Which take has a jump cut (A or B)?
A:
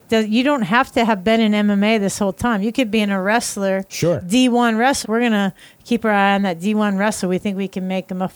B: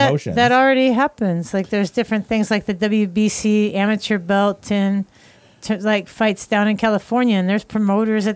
A